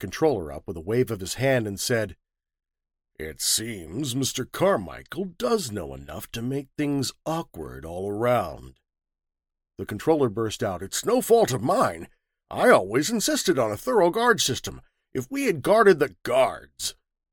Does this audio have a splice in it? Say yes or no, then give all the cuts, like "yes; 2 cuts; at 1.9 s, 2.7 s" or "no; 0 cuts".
no; 0 cuts